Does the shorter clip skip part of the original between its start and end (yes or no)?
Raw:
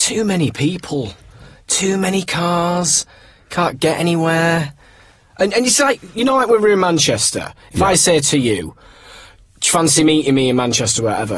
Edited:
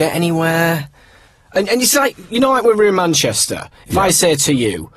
no